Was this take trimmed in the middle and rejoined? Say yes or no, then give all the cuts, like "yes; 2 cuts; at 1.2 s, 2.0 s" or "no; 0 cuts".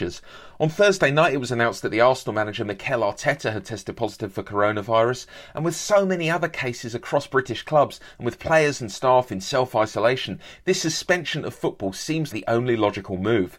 yes; 1 cut; at 12.3 s